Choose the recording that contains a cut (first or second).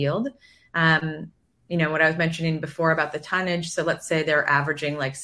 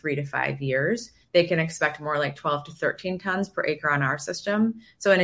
second